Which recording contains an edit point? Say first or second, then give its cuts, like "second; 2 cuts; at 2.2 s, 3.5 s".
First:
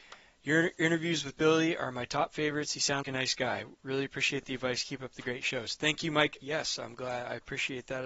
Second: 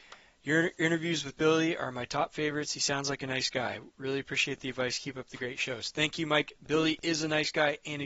first; 2 cuts; at 3.0 s, 6.4 s